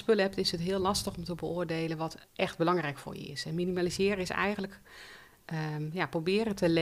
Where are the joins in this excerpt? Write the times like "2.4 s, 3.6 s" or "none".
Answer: 2.2 s